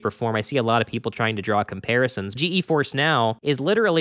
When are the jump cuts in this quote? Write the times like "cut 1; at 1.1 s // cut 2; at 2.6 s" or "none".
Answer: cut 1; at 2.4 s